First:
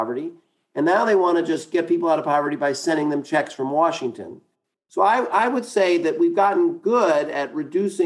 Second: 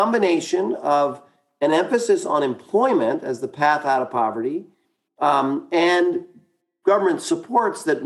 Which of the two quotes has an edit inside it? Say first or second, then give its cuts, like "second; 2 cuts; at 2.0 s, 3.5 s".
first; 1 cut; at 4.8 s